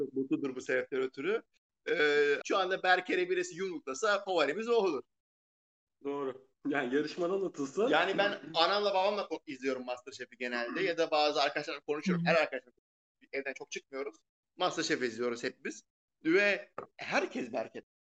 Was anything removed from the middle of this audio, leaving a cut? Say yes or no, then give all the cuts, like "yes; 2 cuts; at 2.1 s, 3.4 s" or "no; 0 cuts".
yes; 1 cut; at 2.4 s